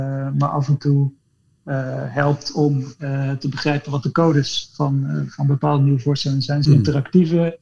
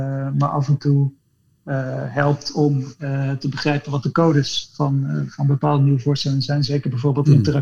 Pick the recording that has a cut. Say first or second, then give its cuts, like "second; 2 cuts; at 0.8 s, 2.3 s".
first; 1 cut; at 6.7 s